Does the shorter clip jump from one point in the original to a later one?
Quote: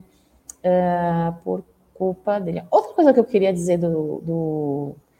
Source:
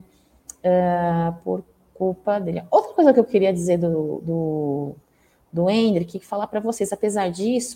no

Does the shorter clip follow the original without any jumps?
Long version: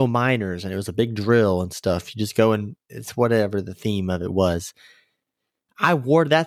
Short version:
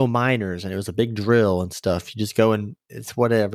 yes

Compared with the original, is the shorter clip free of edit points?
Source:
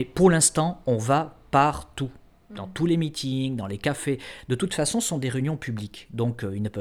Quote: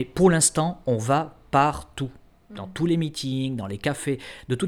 yes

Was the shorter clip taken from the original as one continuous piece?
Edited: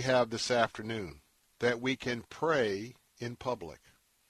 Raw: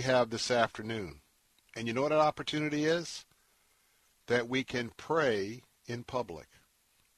no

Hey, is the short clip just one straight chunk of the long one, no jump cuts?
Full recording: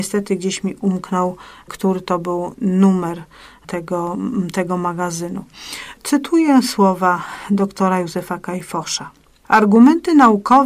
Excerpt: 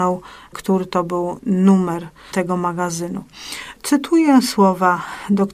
no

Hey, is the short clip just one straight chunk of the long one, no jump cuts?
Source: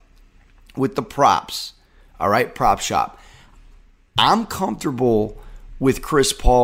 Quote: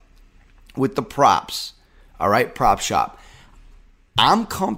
yes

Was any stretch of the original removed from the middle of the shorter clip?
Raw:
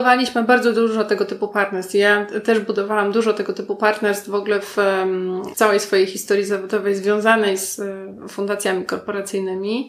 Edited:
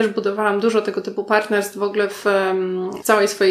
no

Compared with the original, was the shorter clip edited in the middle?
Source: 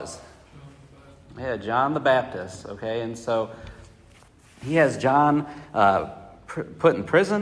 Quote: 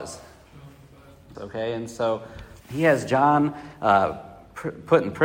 yes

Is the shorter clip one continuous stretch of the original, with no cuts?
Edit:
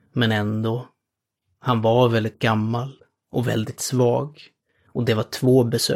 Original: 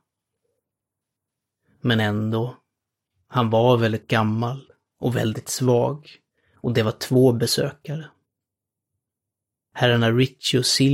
yes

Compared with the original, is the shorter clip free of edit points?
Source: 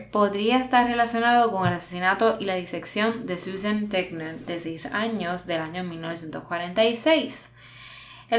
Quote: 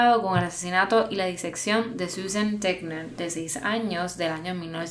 yes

